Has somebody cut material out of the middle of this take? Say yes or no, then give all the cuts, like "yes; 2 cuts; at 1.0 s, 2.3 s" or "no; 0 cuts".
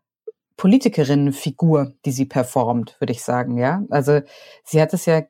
no; 0 cuts